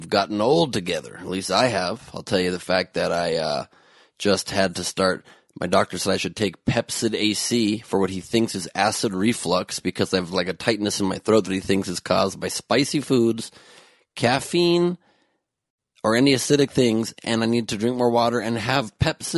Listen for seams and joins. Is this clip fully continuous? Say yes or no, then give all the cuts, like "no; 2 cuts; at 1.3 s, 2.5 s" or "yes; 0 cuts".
yes; 0 cuts